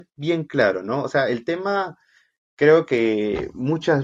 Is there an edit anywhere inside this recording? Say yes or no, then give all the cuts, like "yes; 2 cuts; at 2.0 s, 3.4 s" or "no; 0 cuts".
no; 0 cuts